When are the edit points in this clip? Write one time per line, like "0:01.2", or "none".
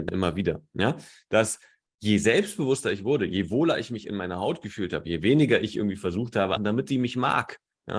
0:01.9
0:06.6